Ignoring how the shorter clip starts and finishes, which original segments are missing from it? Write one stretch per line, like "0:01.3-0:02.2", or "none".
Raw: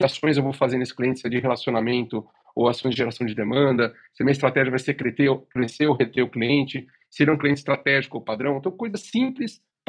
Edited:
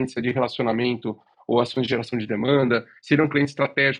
0:04.1-0:07.1